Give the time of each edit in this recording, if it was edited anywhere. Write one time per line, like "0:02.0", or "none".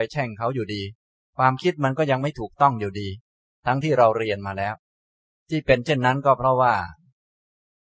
0:03.8